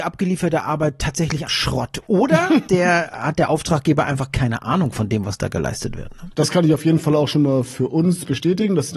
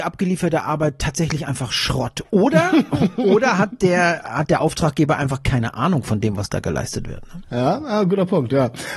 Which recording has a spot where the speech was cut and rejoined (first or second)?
first